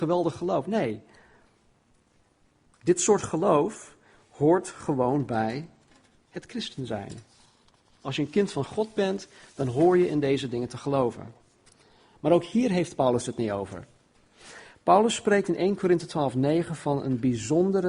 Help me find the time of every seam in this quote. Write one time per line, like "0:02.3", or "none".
0:02.7